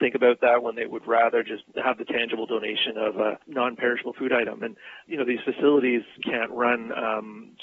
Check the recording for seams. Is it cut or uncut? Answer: cut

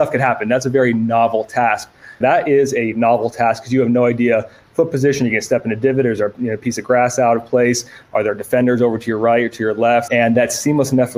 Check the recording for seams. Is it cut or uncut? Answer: cut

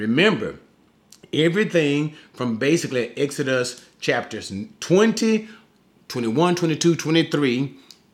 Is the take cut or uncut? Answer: uncut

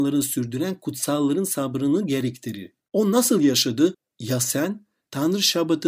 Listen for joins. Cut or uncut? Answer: cut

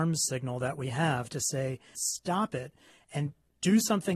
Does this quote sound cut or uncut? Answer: cut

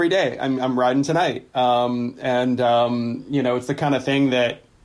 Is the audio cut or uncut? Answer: uncut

